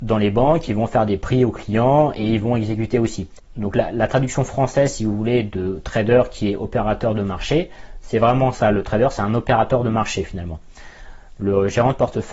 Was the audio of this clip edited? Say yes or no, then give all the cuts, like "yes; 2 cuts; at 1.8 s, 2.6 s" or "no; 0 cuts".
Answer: no; 0 cuts